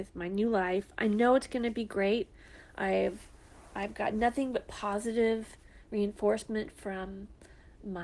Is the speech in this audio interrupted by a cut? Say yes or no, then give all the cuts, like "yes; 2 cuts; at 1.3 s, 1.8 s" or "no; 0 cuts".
no; 0 cuts